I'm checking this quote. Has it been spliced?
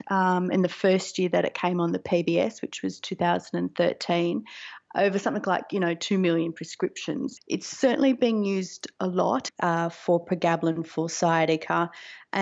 yes; 2 cuts; at 7.4 s, 9.5 s

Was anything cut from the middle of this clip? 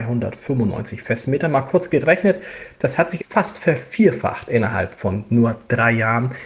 yes; 1 cut; at 3.2 s

